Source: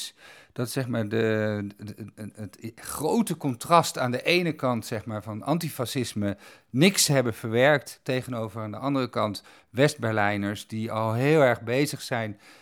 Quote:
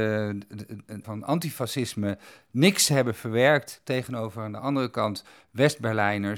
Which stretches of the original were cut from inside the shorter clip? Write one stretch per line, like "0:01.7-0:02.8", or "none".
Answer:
0:02.3-0:05.2

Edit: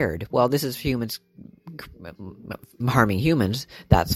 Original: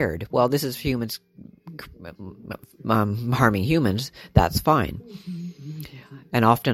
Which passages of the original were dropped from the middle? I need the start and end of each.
0:02.8-0:03.2

